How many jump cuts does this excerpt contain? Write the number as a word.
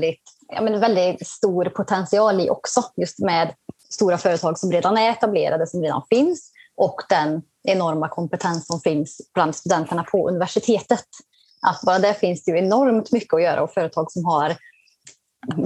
zero